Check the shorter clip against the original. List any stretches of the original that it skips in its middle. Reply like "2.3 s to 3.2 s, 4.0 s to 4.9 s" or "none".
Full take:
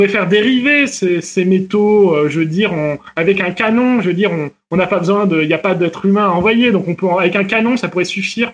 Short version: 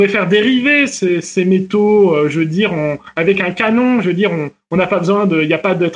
none